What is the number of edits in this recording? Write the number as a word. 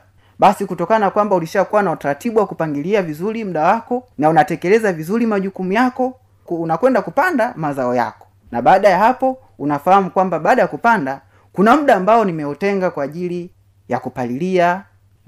two